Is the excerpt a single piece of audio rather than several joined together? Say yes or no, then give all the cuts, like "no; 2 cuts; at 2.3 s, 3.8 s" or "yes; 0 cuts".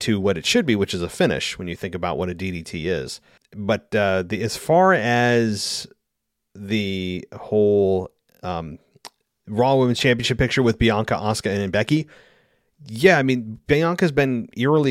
no; 1 cut; at 3.4 s